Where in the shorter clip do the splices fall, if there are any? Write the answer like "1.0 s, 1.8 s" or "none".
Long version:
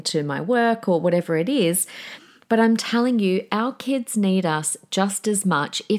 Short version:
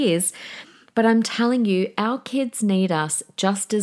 none

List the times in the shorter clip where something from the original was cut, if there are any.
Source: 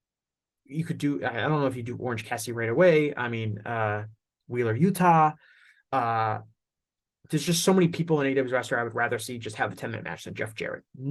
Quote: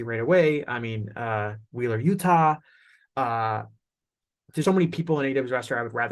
1.7 s, 4.6 s

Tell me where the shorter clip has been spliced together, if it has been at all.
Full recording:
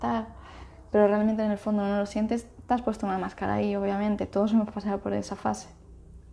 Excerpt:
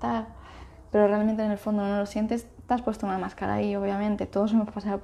none

